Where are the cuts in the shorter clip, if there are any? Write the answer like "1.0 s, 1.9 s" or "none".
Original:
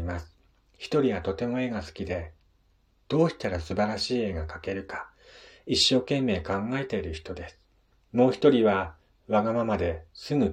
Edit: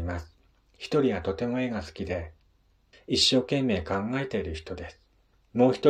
2.9 s